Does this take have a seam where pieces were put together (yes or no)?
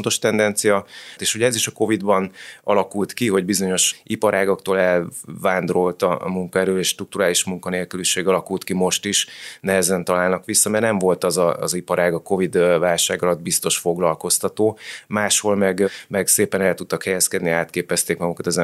yes